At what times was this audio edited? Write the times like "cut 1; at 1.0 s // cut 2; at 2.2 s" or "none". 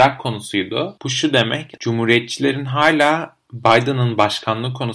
cut 1; at 1.0 s